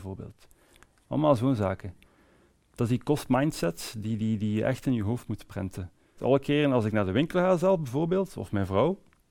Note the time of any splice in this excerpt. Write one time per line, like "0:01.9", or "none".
0:06.2